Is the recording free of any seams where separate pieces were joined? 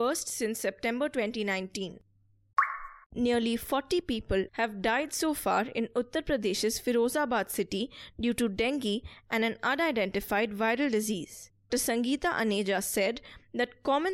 no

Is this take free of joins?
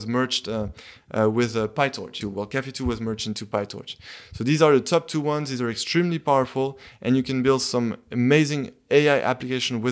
no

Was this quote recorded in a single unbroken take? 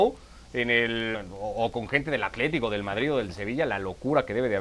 no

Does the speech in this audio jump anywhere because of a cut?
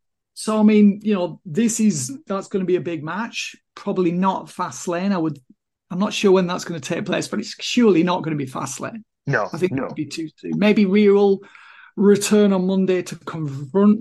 no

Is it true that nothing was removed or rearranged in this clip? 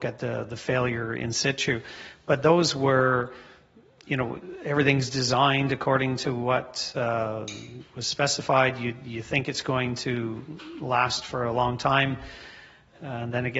yes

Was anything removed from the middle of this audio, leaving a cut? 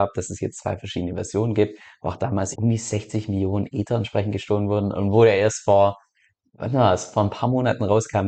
yes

